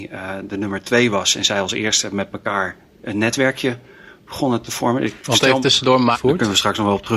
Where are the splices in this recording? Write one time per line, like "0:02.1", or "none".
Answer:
0:06.1